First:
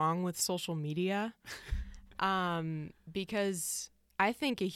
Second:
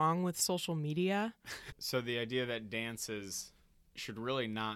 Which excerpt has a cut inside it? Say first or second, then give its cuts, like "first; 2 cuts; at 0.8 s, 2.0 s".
second; 1 cut; at 1.7 s